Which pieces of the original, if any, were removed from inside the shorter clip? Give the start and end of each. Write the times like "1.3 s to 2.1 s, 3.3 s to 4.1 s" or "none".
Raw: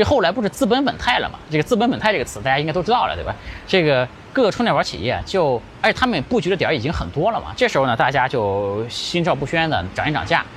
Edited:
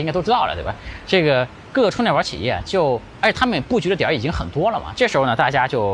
none